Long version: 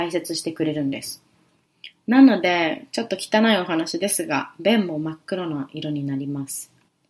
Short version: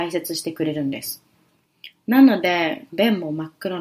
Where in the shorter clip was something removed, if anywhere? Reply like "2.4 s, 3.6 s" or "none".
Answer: 2.9 s